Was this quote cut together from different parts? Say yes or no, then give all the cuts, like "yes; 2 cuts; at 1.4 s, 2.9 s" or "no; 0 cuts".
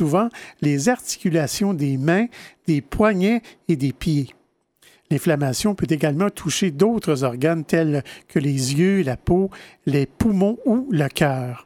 no; 0 cuts